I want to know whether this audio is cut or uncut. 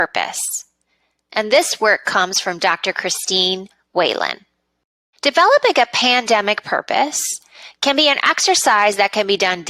uncut